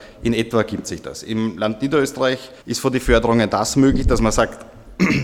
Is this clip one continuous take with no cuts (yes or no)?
no